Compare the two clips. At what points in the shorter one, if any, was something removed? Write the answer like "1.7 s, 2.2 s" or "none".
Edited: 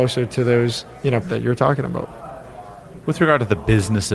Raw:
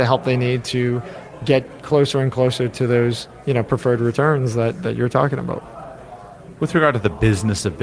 1.2 s